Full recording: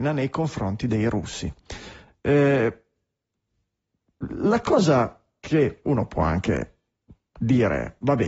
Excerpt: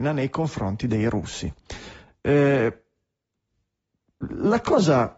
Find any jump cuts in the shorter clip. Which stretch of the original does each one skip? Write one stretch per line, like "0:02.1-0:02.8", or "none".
none